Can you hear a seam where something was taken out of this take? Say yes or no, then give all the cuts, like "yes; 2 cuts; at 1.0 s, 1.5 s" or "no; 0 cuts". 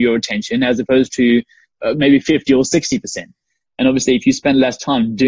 no; 0 cuts